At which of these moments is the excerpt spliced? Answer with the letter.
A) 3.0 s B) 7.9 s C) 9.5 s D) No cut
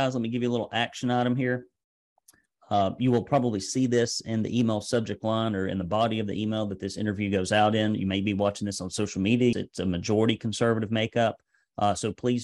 C